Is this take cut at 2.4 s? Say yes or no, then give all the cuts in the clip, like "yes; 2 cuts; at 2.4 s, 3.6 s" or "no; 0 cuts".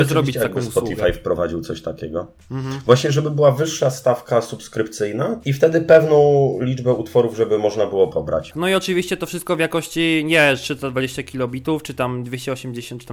no; 1 cut; at 8.5 s